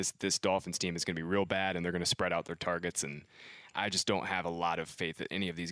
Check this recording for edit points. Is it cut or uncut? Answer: uncut